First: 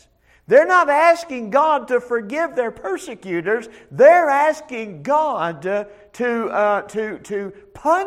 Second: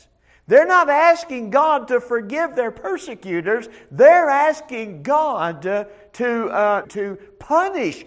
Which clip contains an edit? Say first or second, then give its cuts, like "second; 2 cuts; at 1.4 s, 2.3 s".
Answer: second; 1 cut; at 6.8 s